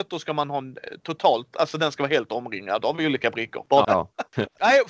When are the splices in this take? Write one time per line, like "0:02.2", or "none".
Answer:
0:03.8